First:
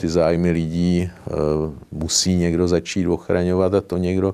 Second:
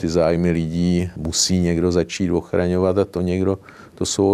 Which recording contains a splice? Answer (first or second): second